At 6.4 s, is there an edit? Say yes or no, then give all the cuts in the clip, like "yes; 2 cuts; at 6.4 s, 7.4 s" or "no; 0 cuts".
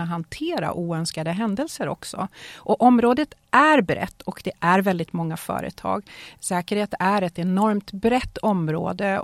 yes; 1 cut; at 6.4 s